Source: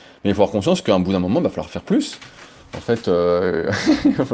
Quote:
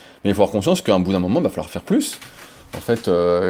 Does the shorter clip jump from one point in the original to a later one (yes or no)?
no